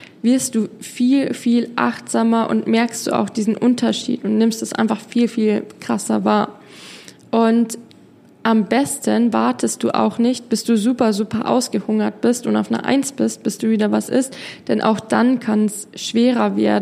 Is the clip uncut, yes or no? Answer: yes